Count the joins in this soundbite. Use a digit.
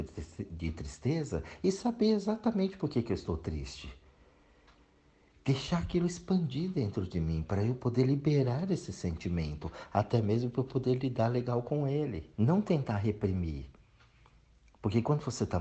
1